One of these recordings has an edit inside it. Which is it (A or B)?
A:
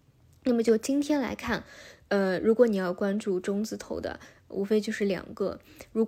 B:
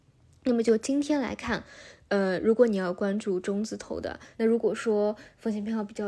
B